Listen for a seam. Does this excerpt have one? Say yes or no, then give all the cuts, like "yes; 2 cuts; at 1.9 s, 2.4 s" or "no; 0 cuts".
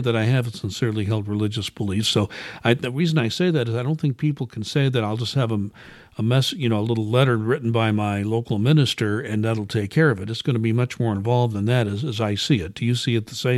no; 0 cuts